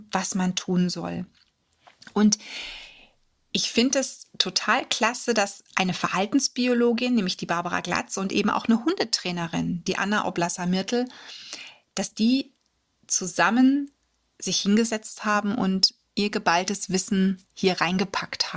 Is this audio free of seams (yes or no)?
yes